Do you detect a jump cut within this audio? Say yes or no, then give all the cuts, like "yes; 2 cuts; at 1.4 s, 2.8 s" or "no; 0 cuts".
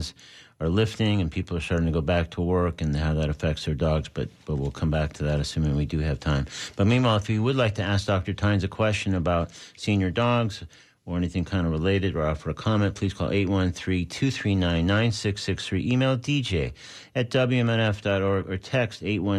no; 0 cuts